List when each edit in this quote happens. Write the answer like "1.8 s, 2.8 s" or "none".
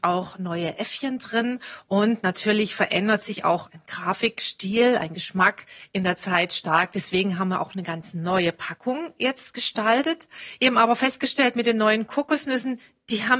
none